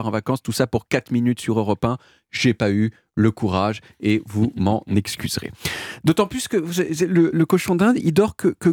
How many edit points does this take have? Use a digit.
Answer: 1